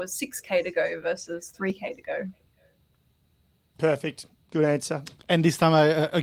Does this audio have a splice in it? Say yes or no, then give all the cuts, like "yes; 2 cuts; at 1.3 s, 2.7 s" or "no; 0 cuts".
yes; 1 cut; at 5.2 s